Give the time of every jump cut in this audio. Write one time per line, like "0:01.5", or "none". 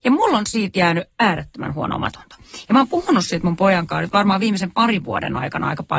none